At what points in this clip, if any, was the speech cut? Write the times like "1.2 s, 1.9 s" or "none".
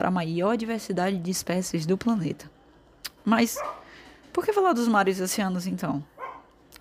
none

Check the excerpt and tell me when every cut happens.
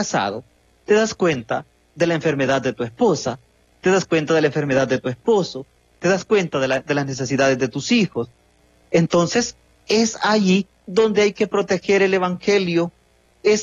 none

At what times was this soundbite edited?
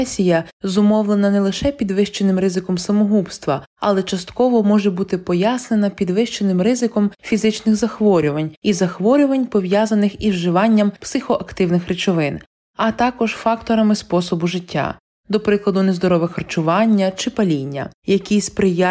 none

